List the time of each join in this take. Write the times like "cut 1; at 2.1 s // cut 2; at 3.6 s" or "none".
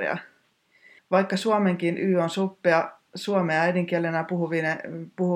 cut 1; at 1.0 s